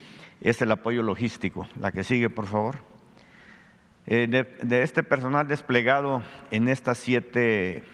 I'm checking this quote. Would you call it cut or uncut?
uncut